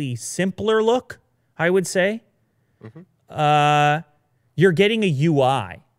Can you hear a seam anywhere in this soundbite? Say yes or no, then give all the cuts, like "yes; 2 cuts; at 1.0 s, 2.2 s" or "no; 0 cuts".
no; 0 cuts